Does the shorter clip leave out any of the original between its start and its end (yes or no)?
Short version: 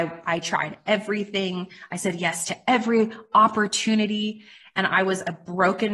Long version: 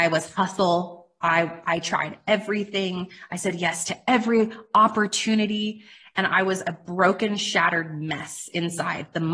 no